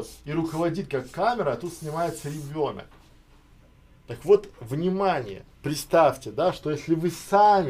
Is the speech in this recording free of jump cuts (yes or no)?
no